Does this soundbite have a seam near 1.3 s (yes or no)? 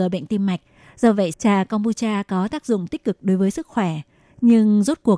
yes